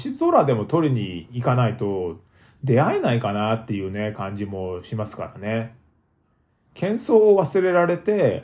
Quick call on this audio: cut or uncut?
uncut